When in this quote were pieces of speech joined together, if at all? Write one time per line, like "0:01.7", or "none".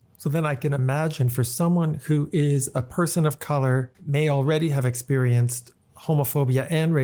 0:03.9